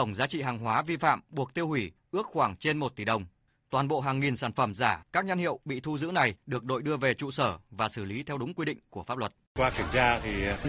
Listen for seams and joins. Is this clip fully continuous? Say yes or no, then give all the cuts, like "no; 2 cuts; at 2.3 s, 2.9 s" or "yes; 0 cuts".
yes; 0 cuts